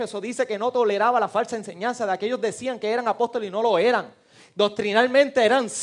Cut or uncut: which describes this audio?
uncut